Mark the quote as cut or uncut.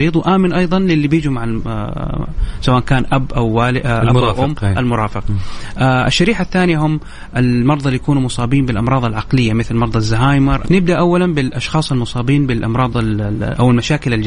cut